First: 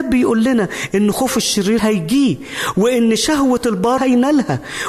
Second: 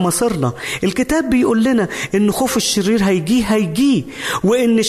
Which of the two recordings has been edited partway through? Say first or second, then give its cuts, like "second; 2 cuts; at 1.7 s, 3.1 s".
first; 2 cuts; at 1.8 s, 4.0 s